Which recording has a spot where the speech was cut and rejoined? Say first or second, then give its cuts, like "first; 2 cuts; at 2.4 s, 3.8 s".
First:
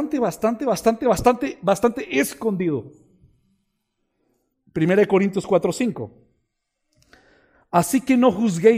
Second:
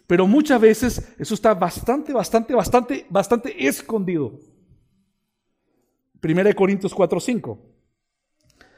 second; 1 cut; at 2.1 s